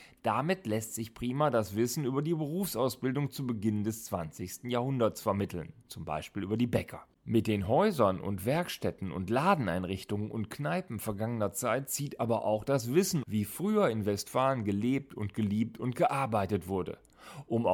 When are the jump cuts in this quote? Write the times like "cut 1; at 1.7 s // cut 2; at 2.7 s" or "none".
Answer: cut 1; at 7.1 s // cut 2; at 13.2 s